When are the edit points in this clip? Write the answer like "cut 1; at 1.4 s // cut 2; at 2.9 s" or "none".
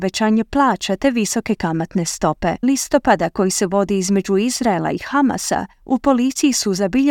cut 1; at 2.6 s // cut 2; at 5.7 s